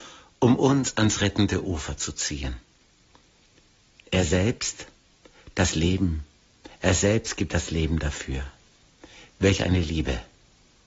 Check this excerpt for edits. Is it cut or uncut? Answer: uncut